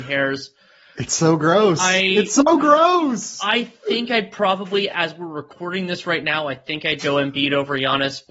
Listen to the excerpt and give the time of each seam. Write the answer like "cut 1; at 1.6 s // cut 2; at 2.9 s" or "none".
none